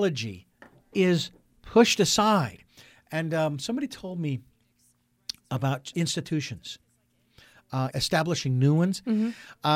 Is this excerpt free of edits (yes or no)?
no